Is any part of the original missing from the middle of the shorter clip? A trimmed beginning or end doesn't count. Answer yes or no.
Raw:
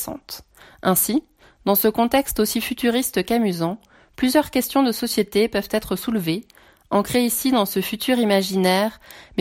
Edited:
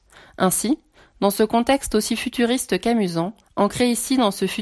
yes